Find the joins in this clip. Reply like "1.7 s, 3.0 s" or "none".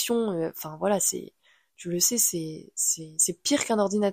none